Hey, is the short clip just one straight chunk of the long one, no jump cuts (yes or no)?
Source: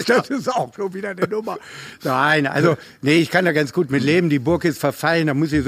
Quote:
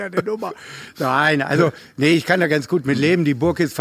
yes